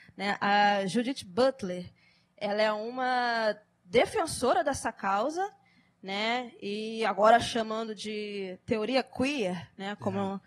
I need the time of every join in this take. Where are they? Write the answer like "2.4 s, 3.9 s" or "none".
none